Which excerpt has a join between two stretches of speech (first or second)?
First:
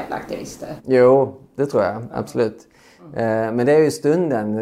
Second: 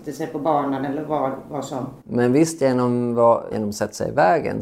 second